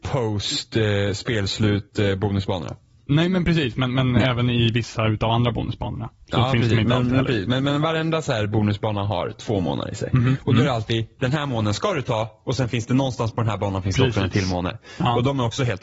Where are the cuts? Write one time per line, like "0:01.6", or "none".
none